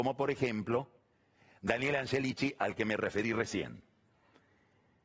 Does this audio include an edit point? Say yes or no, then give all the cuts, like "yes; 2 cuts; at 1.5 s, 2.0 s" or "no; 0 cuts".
no; 0 cuts